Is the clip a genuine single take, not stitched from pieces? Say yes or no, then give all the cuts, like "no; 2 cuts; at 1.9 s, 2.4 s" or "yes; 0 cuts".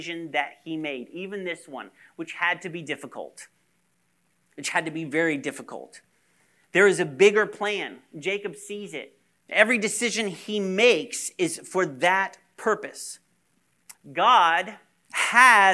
no; 2 cuts; at 9.4 s, 13.9 s